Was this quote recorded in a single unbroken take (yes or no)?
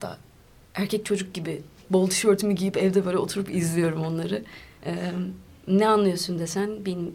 yes